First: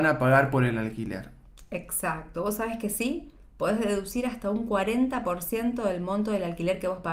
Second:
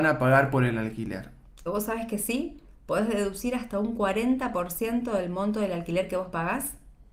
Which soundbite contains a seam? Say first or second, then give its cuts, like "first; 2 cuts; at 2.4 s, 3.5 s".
second; 1 cut; at 1.7 s